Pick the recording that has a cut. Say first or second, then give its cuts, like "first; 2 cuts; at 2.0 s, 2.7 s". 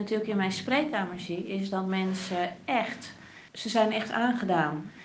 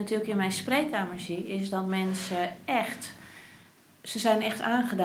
first; 1 cut; at 3.5 s